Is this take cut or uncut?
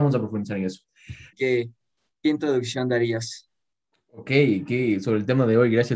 cut